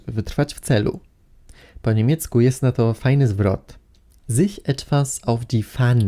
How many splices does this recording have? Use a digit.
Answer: 0